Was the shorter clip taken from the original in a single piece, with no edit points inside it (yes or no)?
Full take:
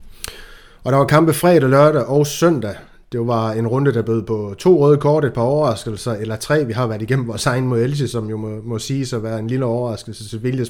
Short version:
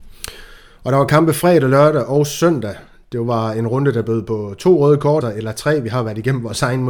no